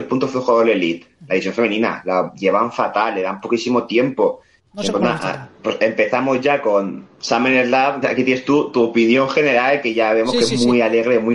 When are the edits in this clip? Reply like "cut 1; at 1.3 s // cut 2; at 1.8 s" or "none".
cut 1; at 4.6 s // cut 2; at 8.0 s